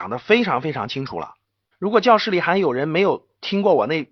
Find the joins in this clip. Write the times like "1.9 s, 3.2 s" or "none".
1.7 s